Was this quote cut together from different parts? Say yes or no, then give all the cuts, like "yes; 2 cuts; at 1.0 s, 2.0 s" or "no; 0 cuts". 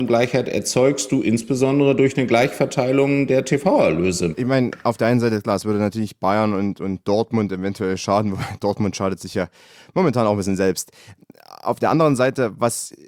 yes; 1 cut; at 4.3 s